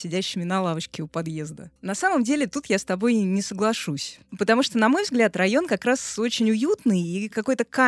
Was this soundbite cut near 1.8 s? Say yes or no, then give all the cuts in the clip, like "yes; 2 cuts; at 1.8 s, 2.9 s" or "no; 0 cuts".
yes; 1 cut; at 1.8 s